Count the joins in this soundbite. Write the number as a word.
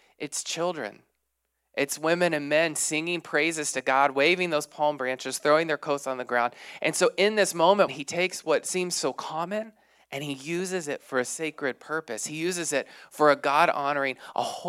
one